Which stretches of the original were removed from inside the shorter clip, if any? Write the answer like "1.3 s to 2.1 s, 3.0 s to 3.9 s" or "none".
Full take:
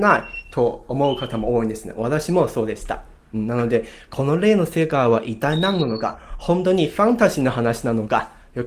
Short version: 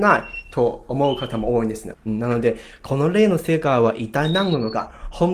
1.9 s to 3.2 s